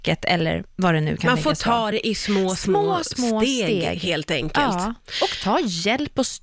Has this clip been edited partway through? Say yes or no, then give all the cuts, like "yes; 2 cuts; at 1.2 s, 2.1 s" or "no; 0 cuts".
no; 0 cuts